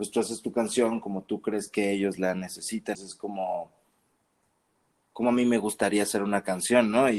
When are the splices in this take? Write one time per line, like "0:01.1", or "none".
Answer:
0:02.9